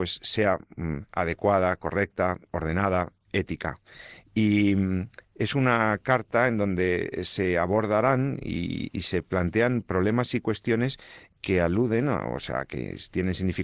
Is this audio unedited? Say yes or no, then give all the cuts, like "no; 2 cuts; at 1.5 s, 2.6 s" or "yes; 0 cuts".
yes; 0 cuts